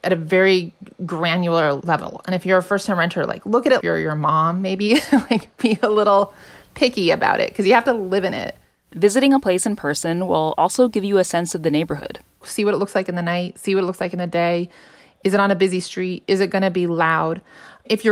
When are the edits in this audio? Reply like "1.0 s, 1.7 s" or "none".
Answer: 3.8 s